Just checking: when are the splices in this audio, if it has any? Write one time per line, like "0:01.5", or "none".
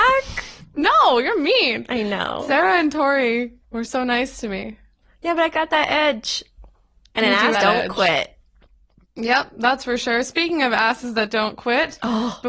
0:03.6
0:07.5